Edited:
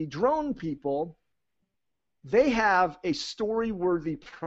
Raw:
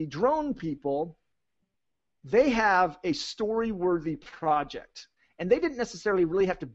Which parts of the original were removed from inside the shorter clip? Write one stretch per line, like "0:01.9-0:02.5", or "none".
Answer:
none